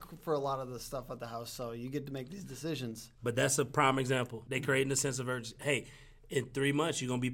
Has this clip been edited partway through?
yes; 1 cut; at 4.5 s

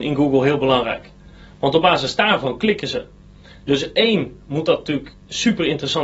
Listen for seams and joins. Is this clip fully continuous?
yes; 0 cuts

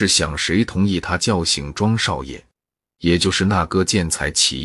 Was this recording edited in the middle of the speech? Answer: yes; 1 cut; at 2.8 s

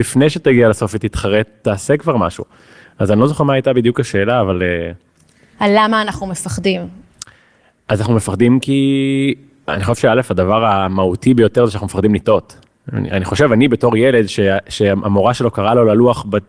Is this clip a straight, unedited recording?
yes; 0 cuts

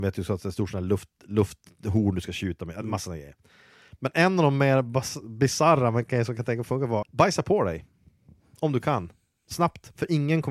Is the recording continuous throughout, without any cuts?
no; 1 cut; at 7.0 s

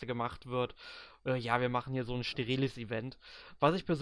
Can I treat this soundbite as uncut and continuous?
yes; 0 cuts

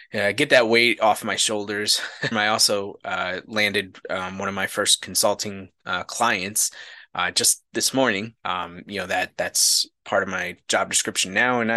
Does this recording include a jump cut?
yes; 2 cuts; at 2.3 s, 8.3 s

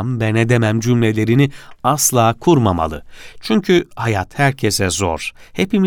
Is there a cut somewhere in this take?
no; 0 cuts

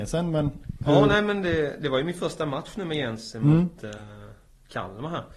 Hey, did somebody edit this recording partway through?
no; 0 cuts

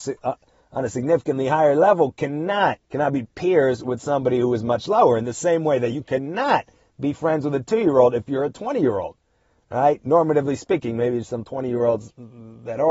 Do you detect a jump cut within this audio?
yes; 1 cut; at 2.8 s

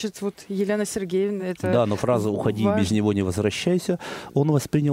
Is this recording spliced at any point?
no; 0 cuts

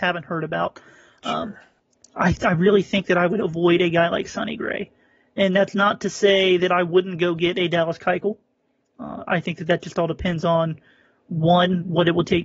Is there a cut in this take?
yes; 1 cut; at 2.0 s

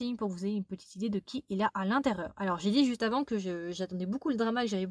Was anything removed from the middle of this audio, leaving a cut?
no; 0 cuts

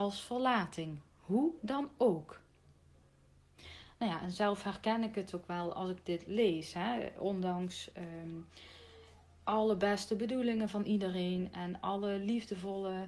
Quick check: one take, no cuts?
yes; 0 cuts

